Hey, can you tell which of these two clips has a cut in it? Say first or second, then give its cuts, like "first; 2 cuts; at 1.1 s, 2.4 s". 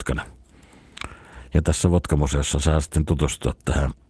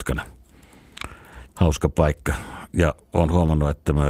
second; 1 cut; at 1.5 s